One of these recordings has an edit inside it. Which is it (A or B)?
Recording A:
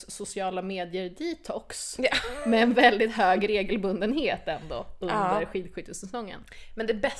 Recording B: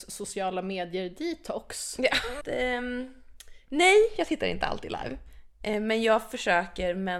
B